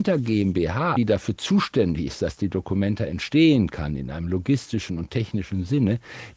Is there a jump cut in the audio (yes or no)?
yes